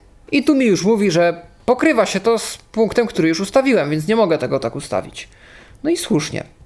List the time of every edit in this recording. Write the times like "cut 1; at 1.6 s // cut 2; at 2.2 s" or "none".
none